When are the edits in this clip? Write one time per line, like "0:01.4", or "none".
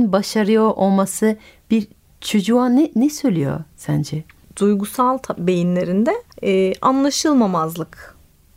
0:04.4
0:06.3